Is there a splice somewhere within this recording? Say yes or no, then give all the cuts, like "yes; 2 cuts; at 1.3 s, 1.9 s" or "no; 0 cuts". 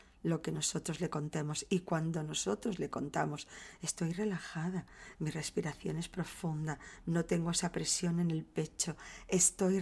yes; 2 cuts; at 5.1 s, 7.0 s